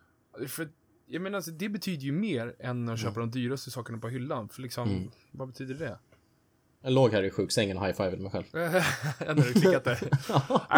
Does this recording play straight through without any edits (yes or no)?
no